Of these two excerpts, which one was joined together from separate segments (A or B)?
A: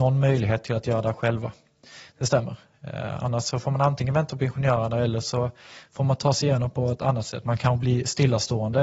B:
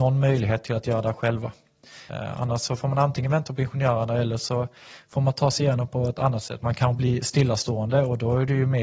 B